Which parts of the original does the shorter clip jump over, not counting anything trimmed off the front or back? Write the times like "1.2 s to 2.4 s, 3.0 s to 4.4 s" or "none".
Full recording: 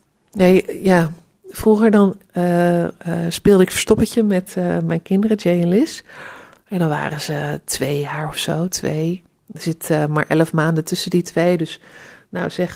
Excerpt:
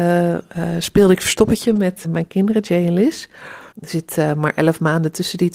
4.5 s to 4.8 s, 6.5 s to 9.4 s